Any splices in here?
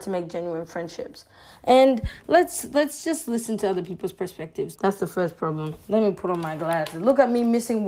yes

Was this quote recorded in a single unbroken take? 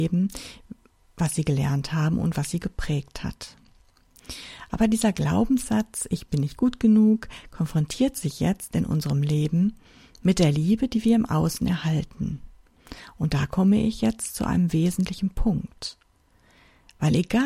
yes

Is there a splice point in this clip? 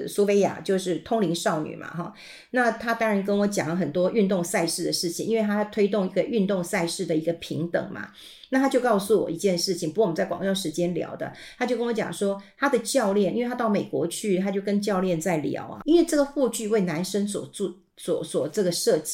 yes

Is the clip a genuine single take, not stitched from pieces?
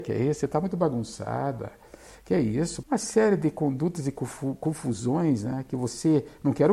no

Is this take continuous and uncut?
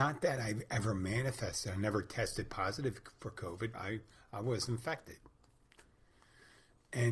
no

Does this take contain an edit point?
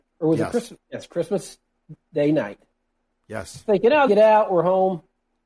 yes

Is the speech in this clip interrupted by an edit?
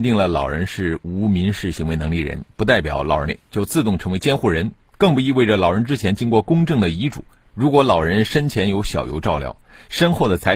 yes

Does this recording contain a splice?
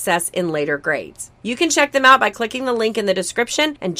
yes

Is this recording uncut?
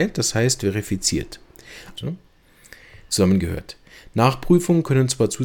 no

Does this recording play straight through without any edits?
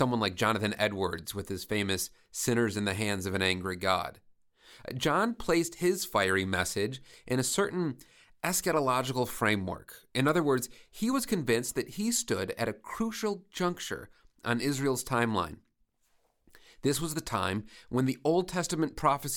yes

